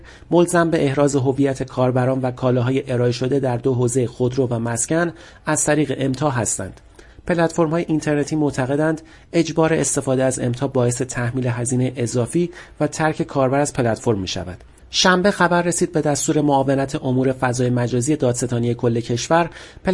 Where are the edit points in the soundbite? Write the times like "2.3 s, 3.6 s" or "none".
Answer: 7.1 s, 14.8 s